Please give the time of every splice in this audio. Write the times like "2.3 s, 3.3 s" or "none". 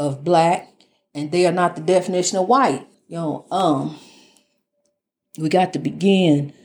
2.9 s